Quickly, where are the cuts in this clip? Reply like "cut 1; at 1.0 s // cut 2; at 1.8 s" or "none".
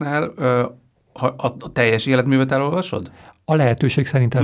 none